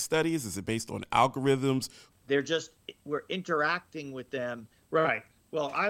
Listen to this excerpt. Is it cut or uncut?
cut